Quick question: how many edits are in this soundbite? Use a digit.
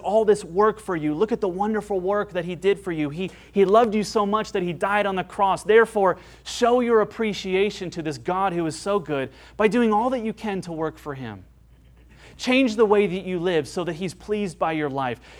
0